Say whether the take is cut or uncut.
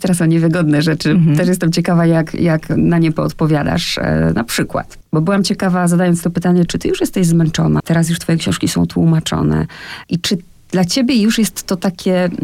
cut